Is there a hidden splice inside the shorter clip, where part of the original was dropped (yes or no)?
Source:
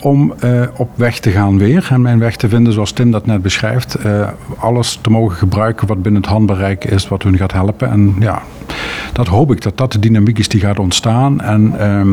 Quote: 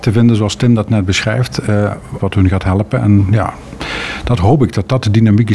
yes